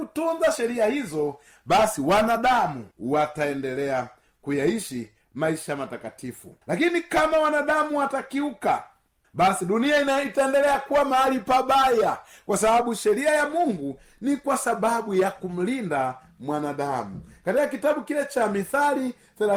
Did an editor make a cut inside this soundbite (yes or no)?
yes